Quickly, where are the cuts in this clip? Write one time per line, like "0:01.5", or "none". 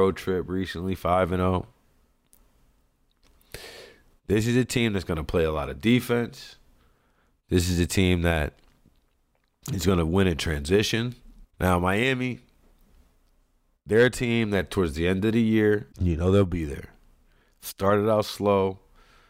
0:11.4
0:15.9